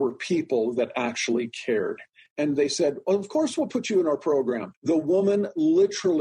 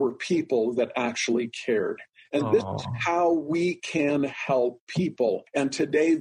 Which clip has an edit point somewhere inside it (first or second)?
first